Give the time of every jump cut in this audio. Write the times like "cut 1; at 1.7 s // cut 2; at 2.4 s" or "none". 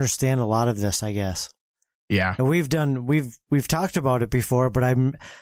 none